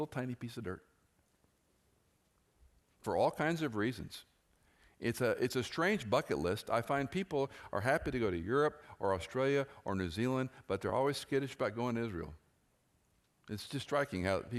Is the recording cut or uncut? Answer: uncut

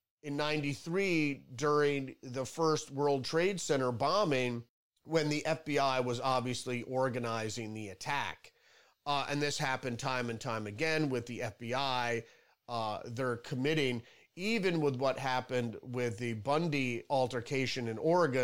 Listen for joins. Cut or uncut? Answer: uncut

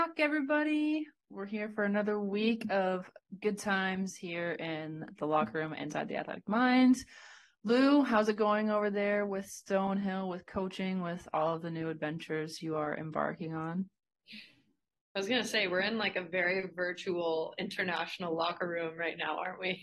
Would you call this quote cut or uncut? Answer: uncut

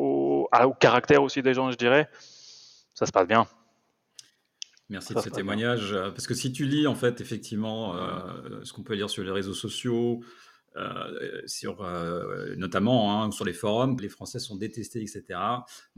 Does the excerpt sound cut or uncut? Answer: cut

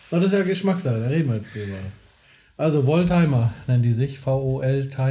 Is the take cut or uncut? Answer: uncut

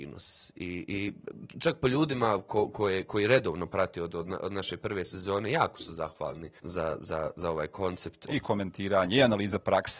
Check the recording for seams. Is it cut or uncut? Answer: cut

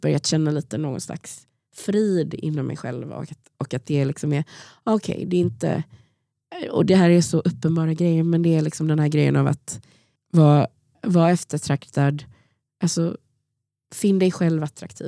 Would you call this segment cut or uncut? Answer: uncut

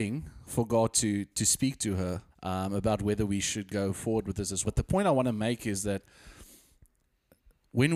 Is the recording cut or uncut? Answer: cut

